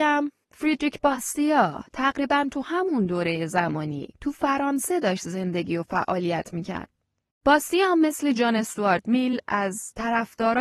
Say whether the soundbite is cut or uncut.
cut